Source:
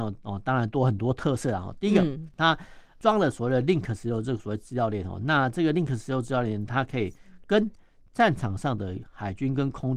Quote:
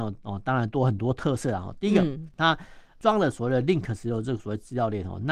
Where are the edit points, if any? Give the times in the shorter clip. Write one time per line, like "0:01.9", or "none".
none